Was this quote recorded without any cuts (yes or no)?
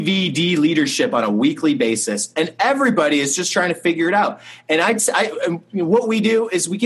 yes